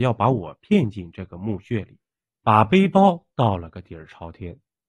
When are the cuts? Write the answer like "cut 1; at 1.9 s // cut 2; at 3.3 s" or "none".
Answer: cut 1; at 2.4 s